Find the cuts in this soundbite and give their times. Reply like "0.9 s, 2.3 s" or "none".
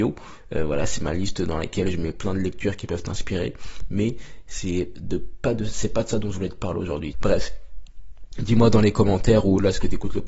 7.1 s